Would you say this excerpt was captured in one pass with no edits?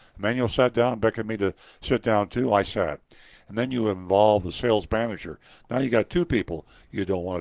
no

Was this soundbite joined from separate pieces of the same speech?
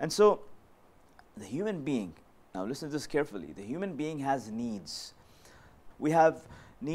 yes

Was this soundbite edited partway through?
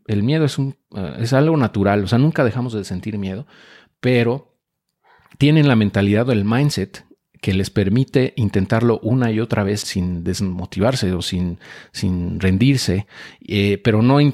yes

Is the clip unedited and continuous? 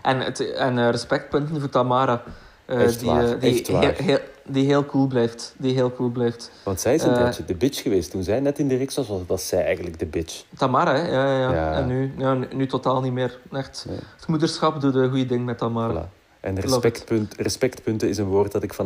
no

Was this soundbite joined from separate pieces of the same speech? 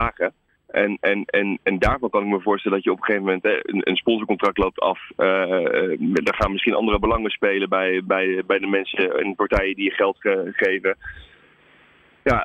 no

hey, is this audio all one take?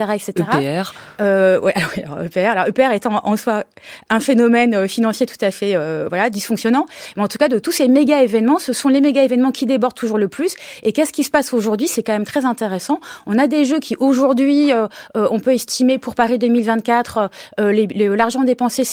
yes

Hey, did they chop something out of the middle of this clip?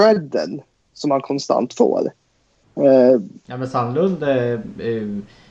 yes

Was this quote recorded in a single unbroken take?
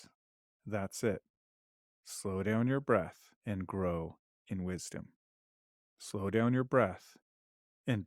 no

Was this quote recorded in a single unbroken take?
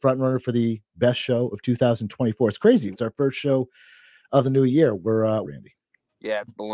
no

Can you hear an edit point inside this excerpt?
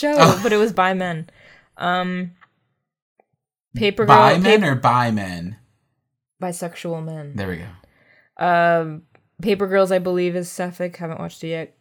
no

